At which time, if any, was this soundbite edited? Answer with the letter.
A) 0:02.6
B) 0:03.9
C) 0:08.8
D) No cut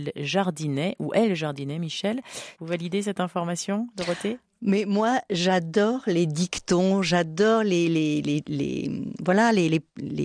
A